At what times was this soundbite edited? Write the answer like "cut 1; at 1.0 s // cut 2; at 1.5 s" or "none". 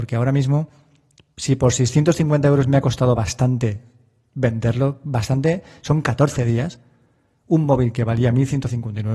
none